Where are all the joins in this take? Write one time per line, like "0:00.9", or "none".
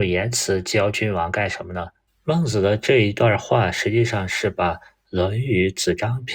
0:02.1